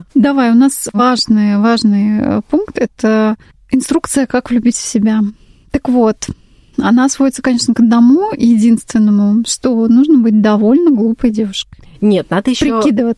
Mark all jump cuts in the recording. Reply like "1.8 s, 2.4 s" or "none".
none